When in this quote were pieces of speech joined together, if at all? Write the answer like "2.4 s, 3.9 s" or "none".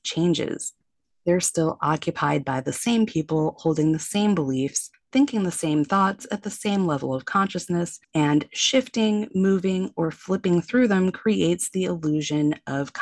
8.0 s

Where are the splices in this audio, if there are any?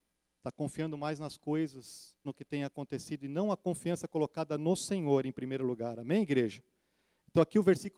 2.3 s

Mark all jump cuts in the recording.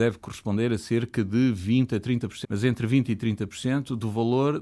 2.4 s

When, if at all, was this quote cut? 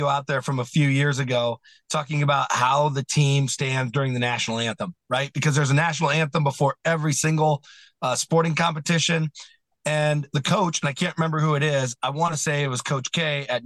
none

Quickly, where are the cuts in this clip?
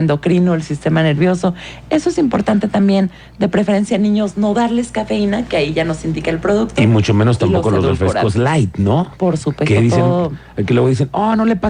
none

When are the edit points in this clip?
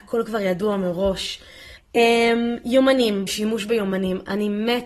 1.8 s, 3.3 s

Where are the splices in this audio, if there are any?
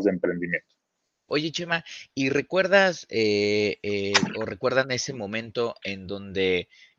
1.3 s

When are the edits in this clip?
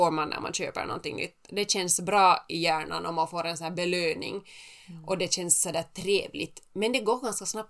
none

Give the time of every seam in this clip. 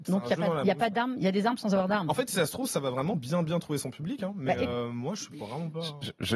none

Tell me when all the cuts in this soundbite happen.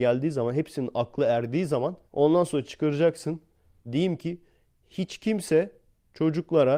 2.1 s, 3.8 s

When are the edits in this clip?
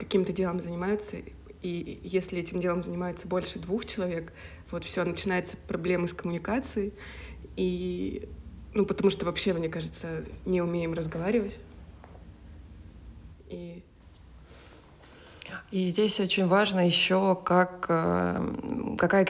13.3 s

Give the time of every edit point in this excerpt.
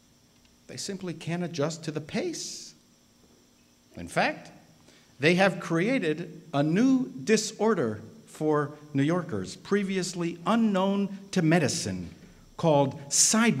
none

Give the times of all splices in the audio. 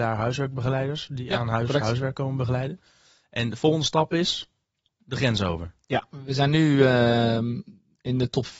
none

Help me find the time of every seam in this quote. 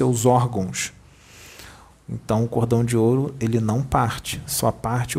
1.9 s

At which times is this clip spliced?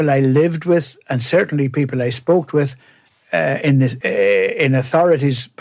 4.0 s

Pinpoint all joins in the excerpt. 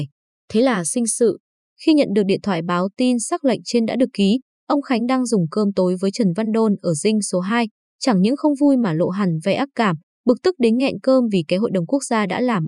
none

